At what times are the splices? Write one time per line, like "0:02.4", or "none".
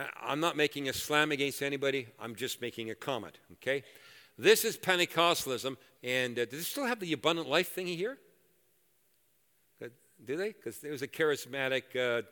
0:06.0